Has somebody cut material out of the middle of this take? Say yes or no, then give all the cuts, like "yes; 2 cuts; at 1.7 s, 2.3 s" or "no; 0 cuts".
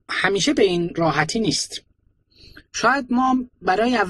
yes; 1 cut; at 2.7 s